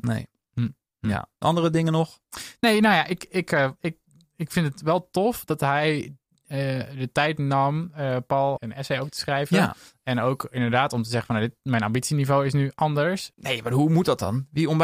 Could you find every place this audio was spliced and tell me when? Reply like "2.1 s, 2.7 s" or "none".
8.6 s, 13.3 s